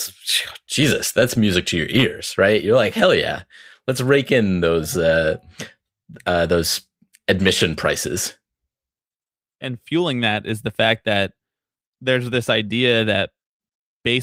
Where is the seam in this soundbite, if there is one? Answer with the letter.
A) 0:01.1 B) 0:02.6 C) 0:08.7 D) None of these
D